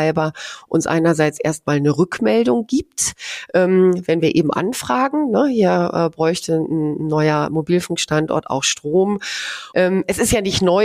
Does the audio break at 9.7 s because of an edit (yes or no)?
yes